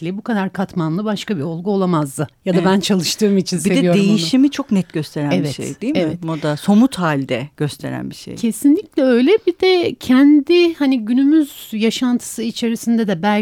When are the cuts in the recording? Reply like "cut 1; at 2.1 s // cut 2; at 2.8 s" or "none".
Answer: none